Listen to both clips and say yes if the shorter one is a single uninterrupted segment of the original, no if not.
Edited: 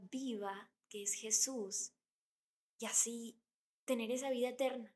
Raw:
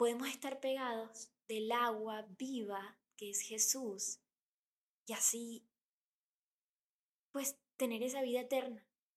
no